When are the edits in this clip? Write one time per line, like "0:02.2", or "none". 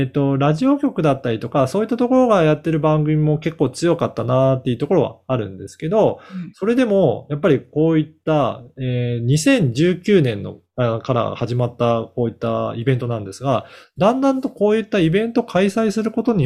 none